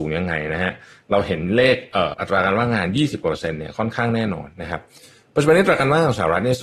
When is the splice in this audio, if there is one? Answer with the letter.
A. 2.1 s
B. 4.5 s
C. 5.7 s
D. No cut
A